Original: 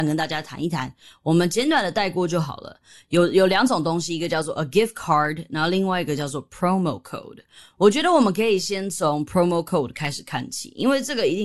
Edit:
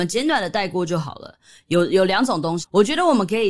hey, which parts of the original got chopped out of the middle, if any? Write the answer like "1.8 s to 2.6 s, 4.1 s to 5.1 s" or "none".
4.0 s to 7.7 s